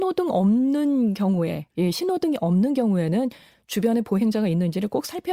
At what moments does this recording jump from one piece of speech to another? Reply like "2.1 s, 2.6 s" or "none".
1.7 s

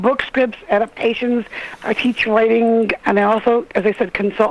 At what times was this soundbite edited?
3.0 s

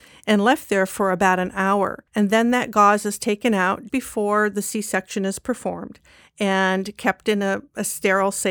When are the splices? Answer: 2.1 s, 3.9 s

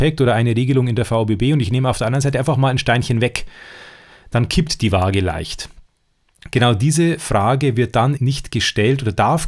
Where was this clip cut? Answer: 6.5 s, 8.2 s

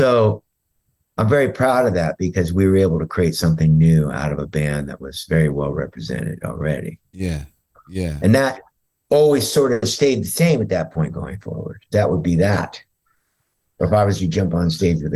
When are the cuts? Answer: 11.9 s

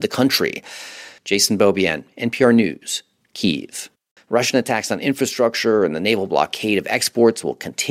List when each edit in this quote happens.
1.2 s, 4.2 s

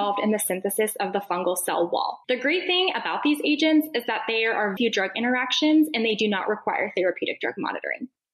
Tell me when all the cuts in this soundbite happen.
2.2 s, 4.8 s

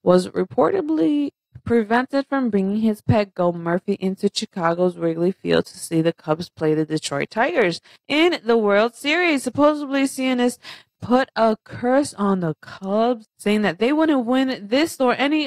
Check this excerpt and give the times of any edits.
none

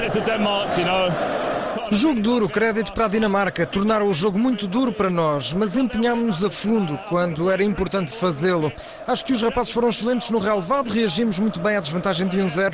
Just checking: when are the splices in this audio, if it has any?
none

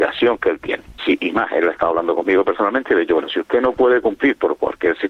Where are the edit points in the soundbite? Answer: 1.0 s

